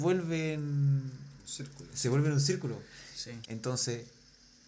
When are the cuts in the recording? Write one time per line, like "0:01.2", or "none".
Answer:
0:03.4